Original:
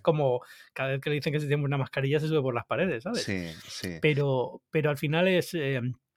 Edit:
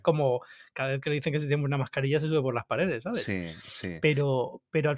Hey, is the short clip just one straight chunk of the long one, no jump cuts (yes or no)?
yes